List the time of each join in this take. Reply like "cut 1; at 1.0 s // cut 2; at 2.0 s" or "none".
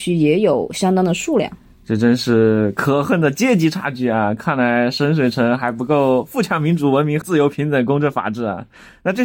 cut 1; at 7.2 s